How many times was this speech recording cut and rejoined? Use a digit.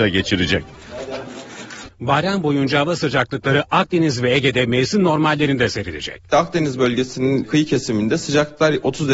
1